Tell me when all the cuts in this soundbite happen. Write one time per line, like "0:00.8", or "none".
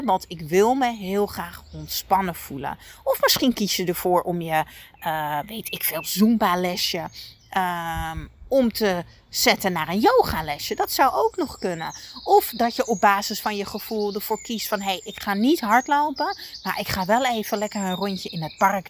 none